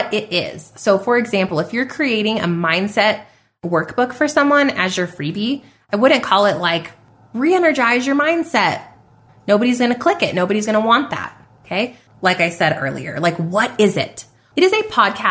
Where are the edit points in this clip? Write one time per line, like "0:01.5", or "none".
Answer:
0:09.3
0:12.1